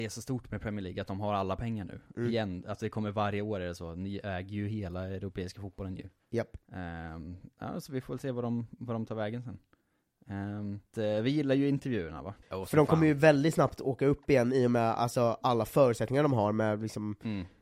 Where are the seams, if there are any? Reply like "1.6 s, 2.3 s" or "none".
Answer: 10.9 s, 12.4 s